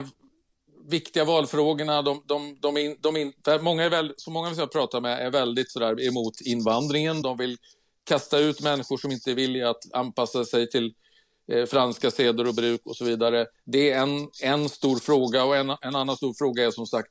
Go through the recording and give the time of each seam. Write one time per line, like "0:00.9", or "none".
0:07.2